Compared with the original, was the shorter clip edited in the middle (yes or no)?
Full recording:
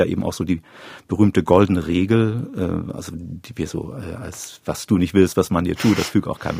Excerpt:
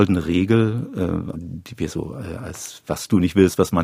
yes